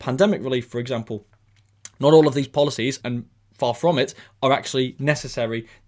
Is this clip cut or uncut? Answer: uncut